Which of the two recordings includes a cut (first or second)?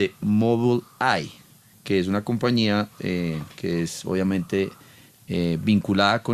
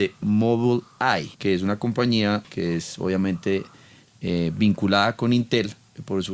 second